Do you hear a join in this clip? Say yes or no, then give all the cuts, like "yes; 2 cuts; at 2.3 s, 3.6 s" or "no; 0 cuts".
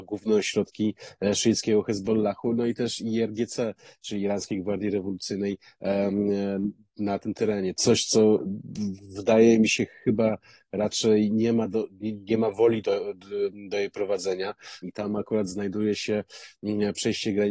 yes; 2 cuts; at 7.7 s, 14.8 s